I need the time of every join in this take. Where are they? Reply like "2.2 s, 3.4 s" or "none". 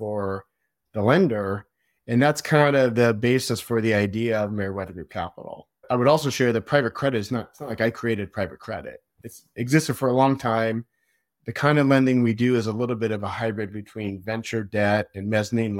none